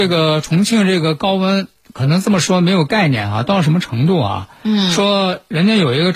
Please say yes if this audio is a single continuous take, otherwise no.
yes